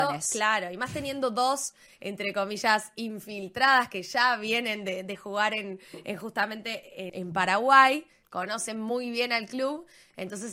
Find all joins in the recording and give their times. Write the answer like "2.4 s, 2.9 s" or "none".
7.1 s

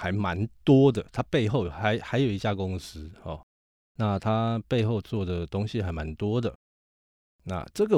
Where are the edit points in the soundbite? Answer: none

